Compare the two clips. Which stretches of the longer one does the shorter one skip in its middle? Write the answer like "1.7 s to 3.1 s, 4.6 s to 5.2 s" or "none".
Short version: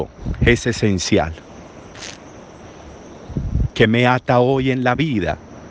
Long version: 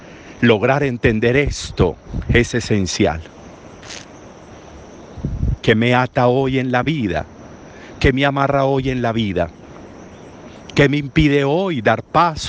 none